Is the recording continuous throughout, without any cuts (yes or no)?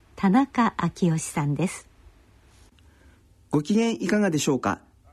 yes